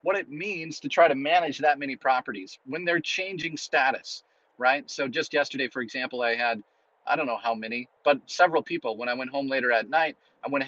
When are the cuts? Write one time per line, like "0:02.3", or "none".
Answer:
0:08.0